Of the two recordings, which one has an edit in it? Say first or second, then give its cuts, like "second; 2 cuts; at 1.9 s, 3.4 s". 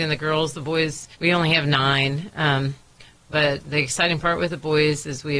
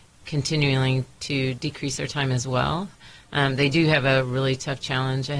first; 1 cut; at 1.1 s